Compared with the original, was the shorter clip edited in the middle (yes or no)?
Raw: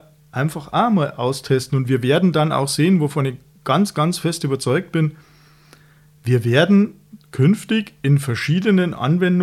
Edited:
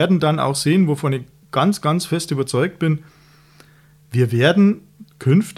no